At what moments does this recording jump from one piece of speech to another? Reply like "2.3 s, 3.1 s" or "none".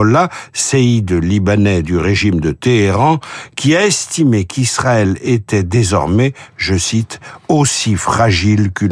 none